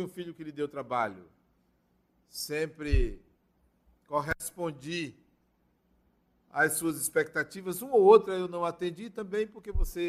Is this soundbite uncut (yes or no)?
yes